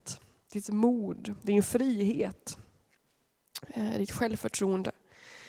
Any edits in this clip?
no; 0 cuts

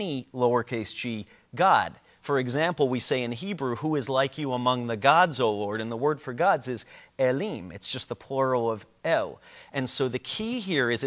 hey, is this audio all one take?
yes; 0 cuts

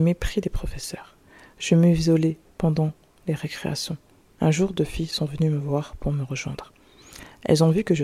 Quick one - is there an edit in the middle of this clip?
no; 0 cuts

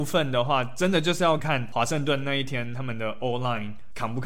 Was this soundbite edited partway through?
yes; 1 cut; at 1.4 s

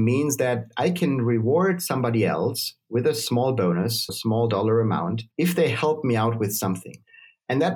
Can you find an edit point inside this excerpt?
yes; 2 cuts; at 4.1 s, 5.3 s

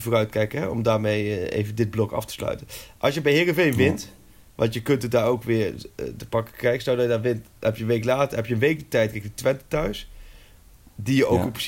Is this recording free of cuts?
yes; 0 cuts

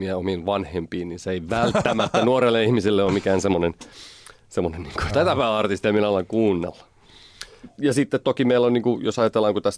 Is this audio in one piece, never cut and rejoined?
no; 1 cut; at 5.1 s

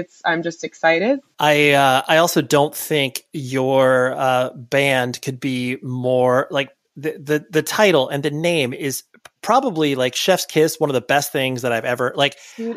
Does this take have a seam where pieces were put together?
yes; 1 cut; at 1.3 s

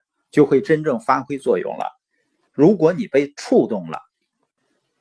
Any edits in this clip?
yes; 1 cut; at 2.5 s

